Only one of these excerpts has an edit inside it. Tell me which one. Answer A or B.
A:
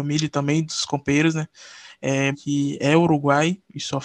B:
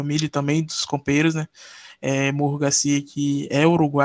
A